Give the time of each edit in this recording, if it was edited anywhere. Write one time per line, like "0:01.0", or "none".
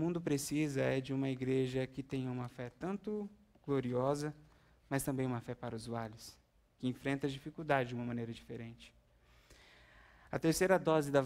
none